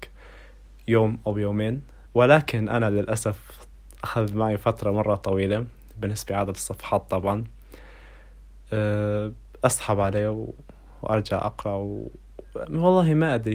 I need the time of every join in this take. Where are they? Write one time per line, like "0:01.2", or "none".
0:02.1
0:12.6